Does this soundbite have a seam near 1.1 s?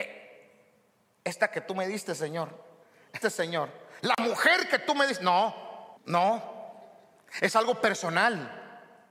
no; 2 cuts; at 3.2 s, 6.0 s

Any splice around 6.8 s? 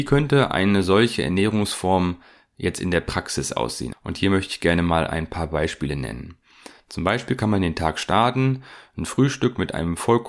no; 1 cut; at 3.9 s

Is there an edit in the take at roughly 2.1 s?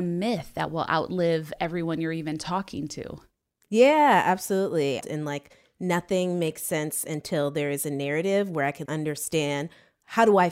no; 2 cuts; at 5.0 s, 8.9 s

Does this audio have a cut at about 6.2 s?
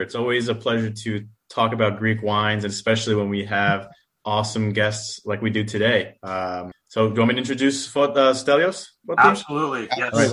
no; 0 cuts

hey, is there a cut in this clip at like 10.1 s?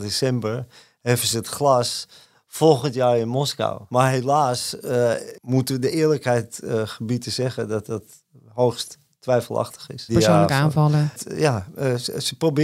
yes; 1 cut; at 10.1 s

